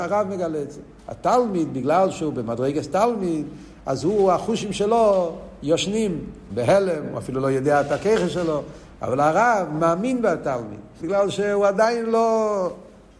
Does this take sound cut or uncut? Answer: cut